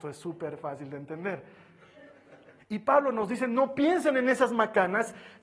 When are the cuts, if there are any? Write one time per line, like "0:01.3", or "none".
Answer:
0:02.6